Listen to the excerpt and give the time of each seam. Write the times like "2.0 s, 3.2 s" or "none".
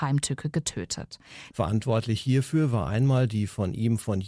1.5 s